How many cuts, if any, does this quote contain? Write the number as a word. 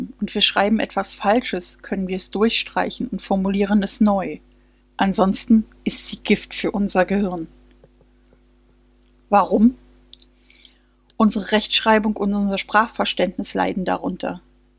one